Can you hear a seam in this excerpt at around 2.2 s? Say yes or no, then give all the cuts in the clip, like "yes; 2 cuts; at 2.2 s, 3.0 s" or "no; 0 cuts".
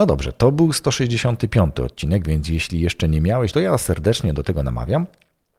no; 1 cut; at 3.5 s